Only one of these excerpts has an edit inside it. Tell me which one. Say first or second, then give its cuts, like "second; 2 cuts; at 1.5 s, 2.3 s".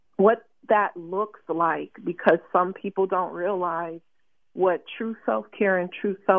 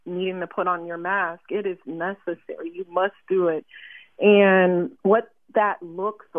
second; 1 cut; at 4.9 s